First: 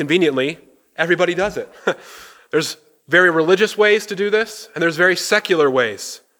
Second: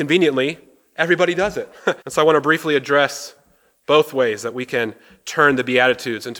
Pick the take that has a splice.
second; 1 cut; at 2.0 s

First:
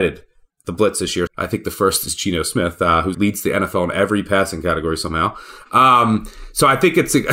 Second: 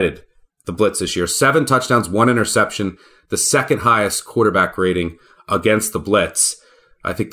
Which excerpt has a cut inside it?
first; 2 cuts; at 1.3 s, 3.1 s

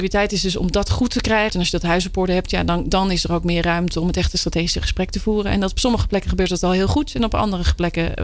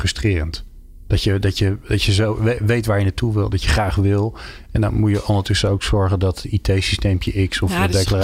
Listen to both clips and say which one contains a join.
first; 1 cut; at 1.5 s

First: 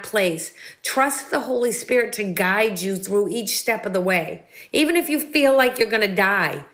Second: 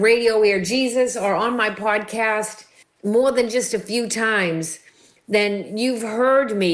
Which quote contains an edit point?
second; 1 cut; at 2.8 s

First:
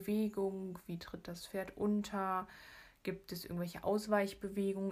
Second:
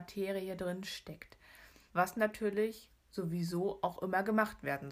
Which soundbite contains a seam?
second; 1 cut; at 1.9 s

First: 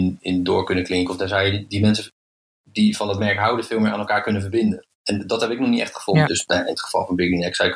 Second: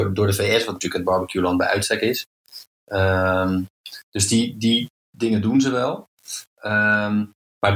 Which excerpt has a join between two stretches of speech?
first; 1 cut; at 6.2 s

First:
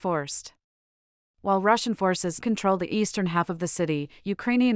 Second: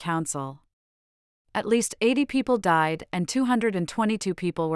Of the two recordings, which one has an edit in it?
first; 1 cut; at 2.4 s

